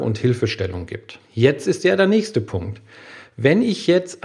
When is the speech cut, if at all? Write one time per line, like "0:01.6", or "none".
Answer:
0:01.2